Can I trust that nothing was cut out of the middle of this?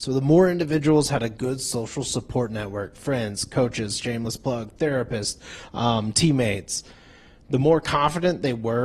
yes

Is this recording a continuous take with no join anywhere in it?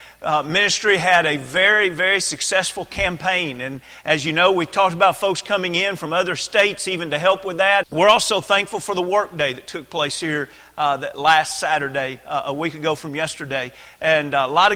no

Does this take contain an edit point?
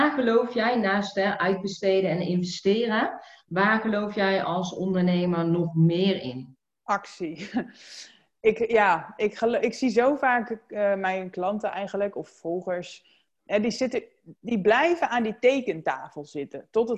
no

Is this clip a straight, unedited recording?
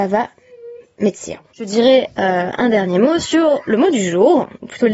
no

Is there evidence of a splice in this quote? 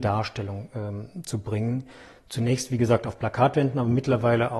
no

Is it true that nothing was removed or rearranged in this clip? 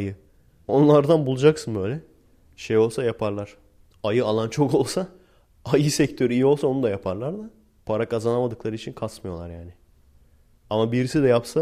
no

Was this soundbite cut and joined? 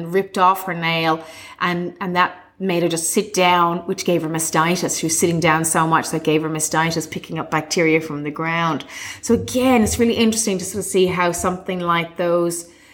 no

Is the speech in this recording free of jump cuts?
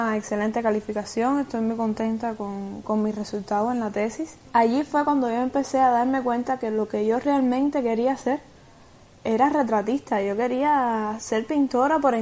no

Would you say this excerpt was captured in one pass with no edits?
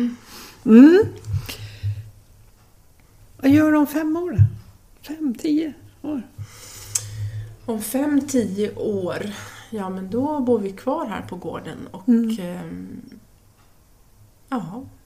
yes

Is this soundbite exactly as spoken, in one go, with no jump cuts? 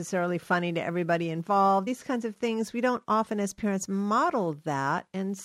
yes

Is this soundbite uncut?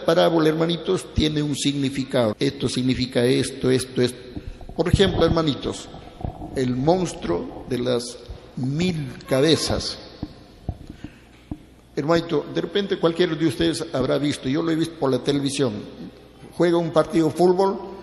no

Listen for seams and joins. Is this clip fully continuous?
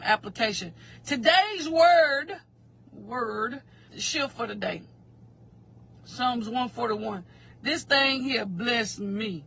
no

